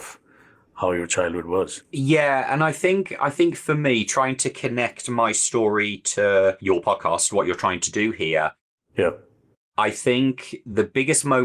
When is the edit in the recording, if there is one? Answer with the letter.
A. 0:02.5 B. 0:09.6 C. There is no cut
C